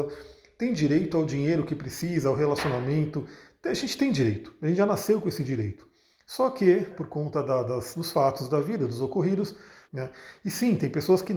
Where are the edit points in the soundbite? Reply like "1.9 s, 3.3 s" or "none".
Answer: 6.9 s, 9.9 s